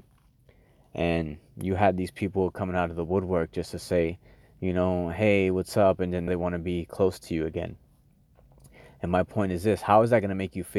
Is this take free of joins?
no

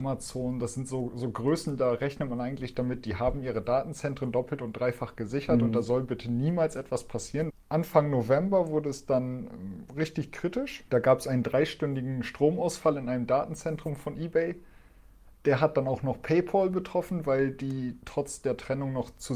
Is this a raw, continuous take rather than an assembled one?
no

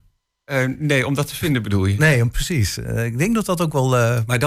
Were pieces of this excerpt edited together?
no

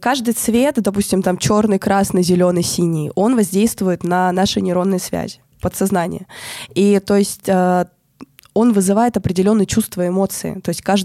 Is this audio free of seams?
yes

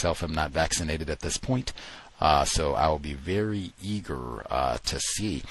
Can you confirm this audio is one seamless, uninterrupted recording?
yes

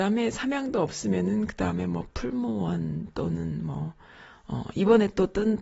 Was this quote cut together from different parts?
no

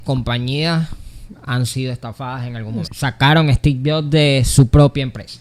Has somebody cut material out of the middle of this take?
yes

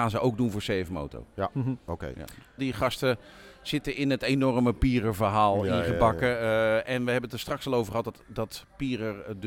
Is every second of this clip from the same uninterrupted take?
no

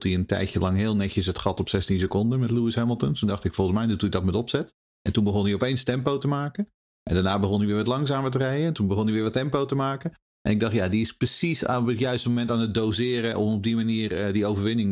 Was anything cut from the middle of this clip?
no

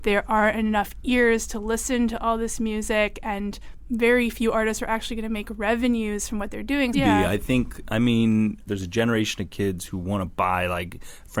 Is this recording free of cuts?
no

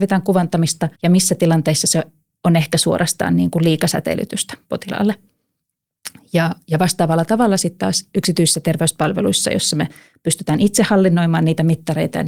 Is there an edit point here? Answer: yes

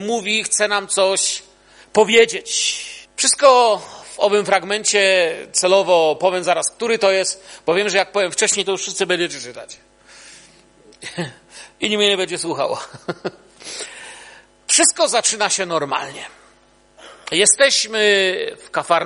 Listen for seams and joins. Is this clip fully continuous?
no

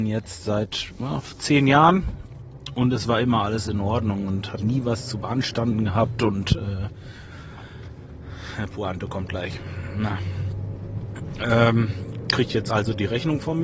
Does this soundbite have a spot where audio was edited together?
yes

